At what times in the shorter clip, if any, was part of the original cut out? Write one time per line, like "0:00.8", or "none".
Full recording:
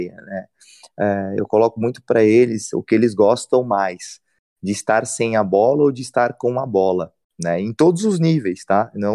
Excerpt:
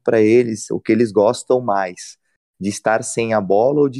none